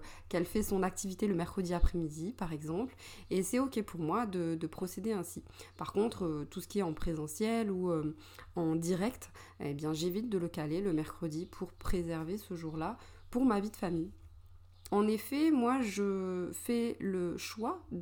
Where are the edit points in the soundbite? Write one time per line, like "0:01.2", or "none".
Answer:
0:14.9